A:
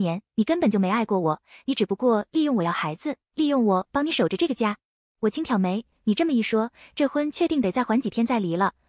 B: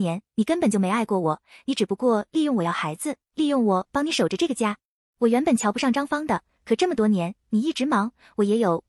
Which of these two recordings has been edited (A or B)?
B